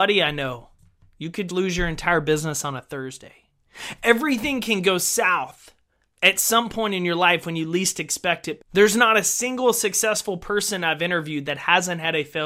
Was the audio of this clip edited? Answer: yes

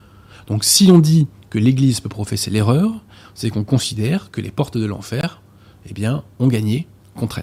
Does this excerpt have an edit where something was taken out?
no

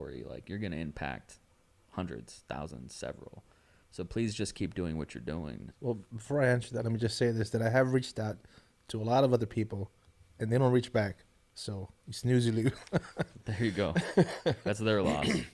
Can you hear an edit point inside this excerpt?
yes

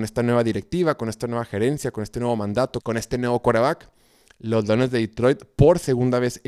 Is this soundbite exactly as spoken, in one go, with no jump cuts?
no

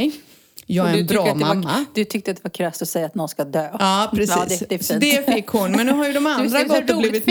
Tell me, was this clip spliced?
no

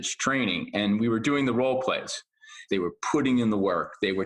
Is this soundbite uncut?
no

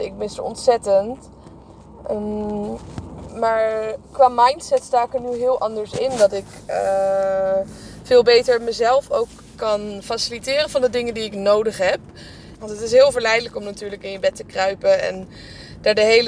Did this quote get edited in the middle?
yes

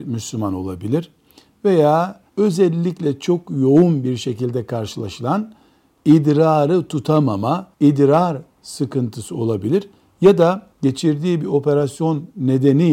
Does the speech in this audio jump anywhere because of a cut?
yes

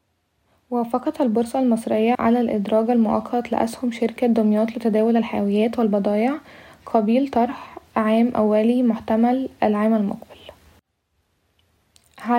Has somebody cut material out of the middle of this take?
yes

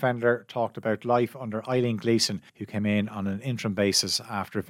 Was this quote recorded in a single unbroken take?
no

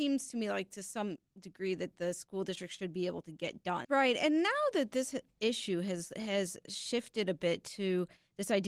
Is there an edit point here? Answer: yes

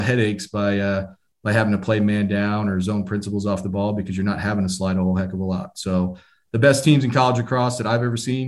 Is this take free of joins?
yes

